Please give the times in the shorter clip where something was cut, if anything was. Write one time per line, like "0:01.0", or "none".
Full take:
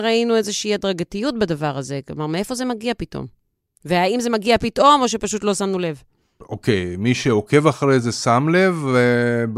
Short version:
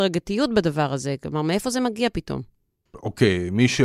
0:02.9